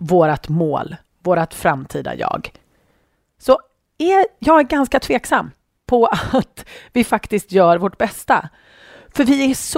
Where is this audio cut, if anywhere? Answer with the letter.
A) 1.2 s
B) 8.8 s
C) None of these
A